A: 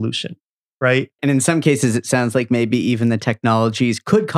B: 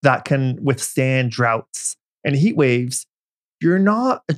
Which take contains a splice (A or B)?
A